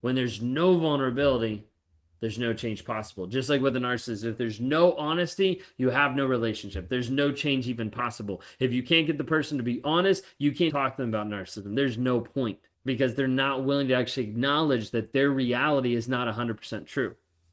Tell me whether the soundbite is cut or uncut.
cut